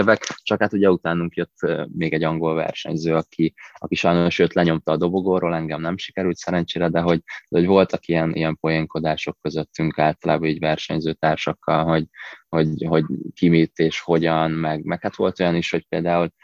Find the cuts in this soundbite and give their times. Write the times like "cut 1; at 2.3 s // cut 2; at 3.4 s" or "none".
cut 1; at 8.3 s